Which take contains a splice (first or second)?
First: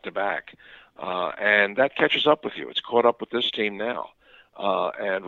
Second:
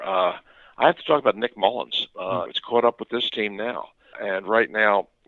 second